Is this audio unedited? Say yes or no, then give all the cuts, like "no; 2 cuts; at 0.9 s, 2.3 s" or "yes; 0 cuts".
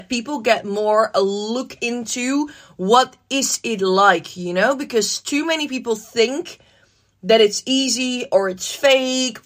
yes; 0 cuts